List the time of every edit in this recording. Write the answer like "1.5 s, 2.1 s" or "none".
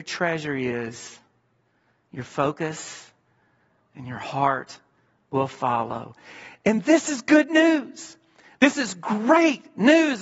none